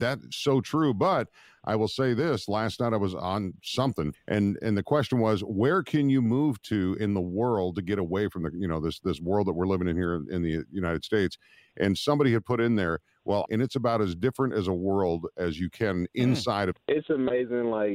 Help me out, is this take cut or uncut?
cut